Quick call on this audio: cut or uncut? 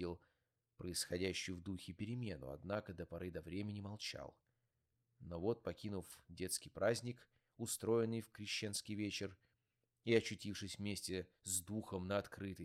uncut